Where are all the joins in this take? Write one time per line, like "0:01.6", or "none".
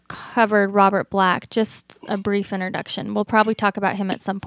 none